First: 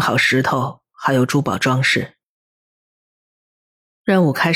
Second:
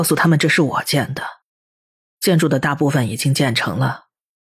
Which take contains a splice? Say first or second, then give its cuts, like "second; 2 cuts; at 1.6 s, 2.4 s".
second; 1 cut; at 2.1 s